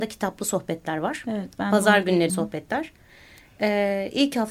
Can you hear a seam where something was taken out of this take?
yes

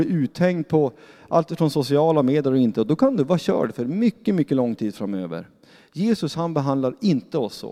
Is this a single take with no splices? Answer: yes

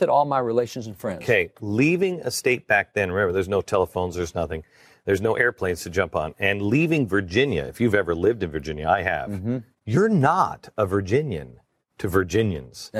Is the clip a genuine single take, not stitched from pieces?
yes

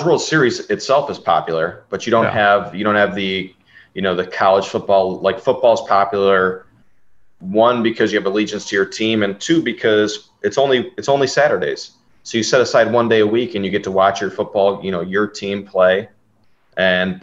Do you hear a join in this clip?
no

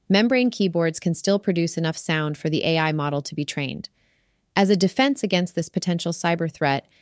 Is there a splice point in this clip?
no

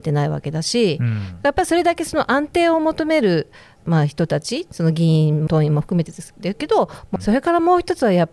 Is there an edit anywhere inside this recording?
yes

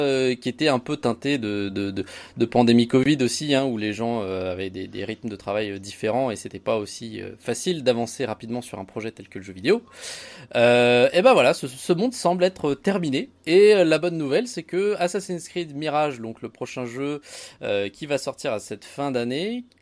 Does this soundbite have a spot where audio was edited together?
no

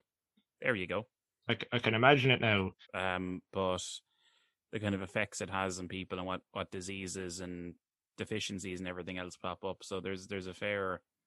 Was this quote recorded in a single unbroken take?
no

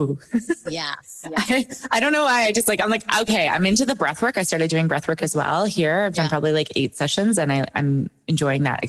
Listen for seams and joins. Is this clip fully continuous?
yes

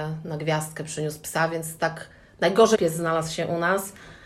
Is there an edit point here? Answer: yes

